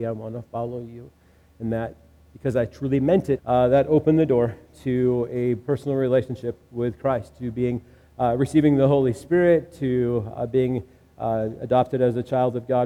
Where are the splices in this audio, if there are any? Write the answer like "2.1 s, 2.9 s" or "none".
3.4 s

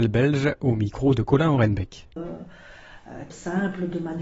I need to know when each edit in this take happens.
2.2 s, 3.3 s

